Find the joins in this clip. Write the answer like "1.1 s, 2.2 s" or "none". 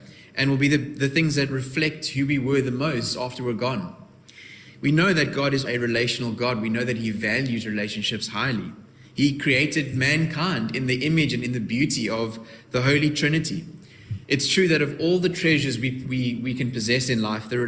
5.7 s, 14.2 s